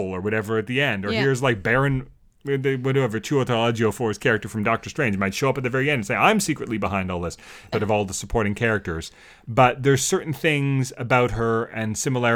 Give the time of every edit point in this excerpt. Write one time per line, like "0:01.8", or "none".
0:07.7